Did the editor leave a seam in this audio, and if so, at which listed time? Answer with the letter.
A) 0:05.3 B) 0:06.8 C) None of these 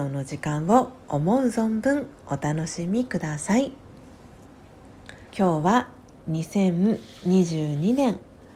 A